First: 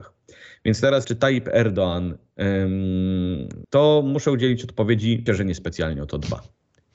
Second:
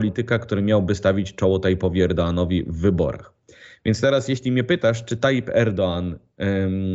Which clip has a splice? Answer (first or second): first